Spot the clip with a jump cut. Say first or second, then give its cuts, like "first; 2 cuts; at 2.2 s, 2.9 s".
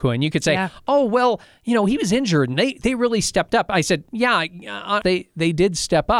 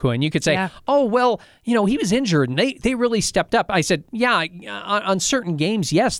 first; 1 cut; at 5.0 s